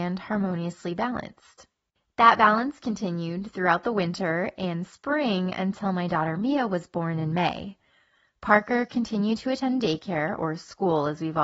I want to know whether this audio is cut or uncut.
uncut